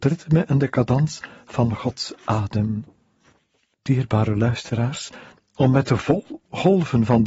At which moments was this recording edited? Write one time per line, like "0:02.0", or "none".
0:03.7
0:05.4